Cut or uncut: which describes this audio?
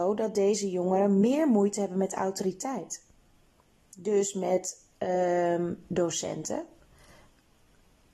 uncut